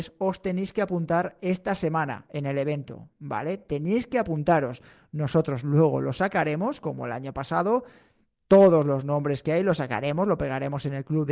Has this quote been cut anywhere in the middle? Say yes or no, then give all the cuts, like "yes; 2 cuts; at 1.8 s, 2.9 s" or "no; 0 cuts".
no; 0 cuts